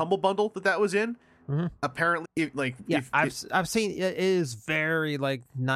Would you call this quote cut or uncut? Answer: cut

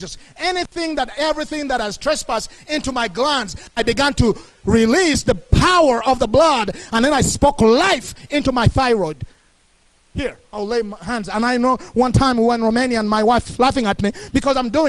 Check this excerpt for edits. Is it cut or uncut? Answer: cut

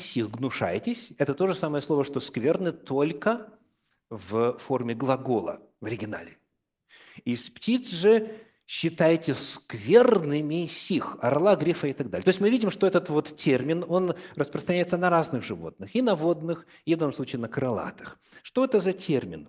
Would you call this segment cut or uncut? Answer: uncut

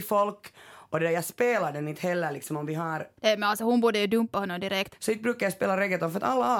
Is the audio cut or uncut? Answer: cut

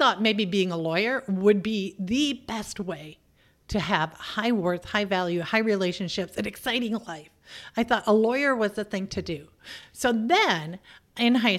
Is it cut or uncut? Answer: uncut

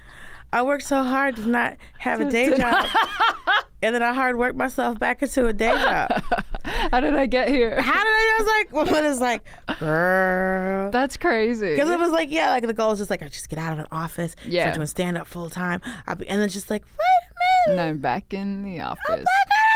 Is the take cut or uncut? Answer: uncut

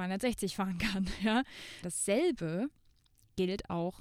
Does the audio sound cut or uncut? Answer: cut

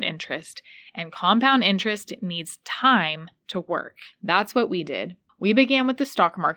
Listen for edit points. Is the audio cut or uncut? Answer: cut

